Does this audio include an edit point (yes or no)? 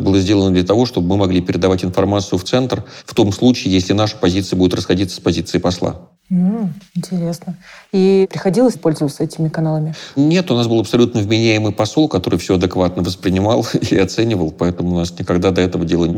yes